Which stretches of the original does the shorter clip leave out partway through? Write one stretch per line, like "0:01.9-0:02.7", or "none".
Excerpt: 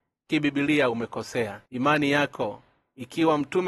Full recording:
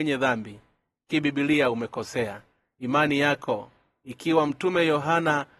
0:02.5-0:02.7